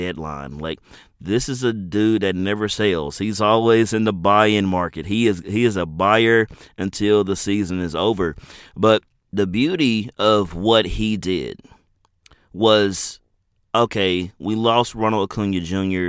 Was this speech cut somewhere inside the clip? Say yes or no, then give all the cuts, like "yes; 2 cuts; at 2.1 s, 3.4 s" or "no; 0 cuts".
no; 0 cuts